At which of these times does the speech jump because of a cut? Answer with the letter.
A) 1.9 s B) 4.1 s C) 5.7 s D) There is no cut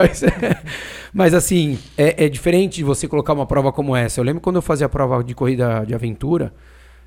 D